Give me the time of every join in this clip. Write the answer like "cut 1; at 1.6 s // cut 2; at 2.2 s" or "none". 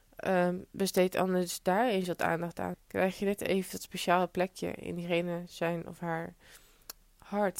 cut 1; at 2.7 s